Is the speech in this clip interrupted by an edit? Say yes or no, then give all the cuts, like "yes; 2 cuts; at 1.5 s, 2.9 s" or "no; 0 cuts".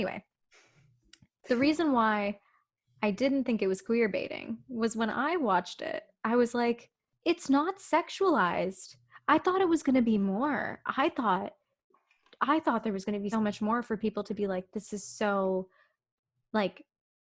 yes; 1 cut; at 13.3 s